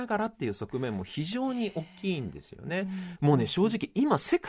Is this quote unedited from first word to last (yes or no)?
no